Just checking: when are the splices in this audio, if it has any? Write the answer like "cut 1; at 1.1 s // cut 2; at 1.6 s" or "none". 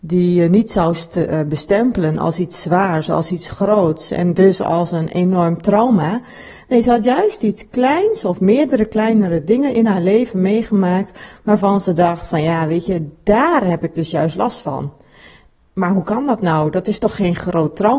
none